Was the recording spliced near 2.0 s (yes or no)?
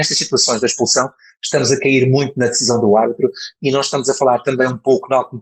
no